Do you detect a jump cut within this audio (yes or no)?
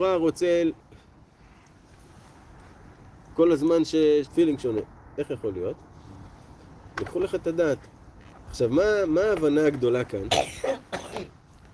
yes